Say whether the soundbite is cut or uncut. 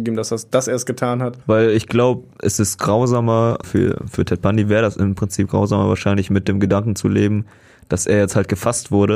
cut